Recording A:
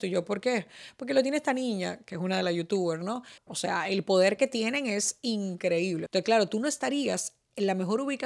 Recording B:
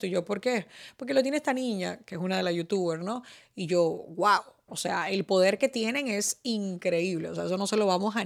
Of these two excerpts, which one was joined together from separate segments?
A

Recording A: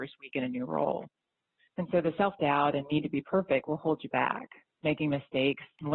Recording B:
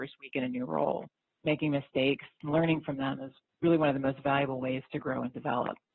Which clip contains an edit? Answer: B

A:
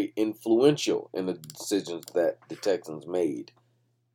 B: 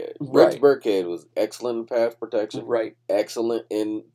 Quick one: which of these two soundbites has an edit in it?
B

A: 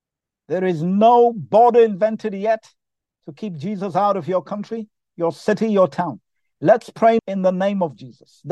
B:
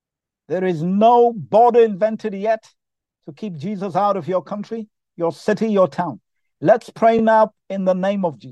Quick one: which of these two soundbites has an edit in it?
A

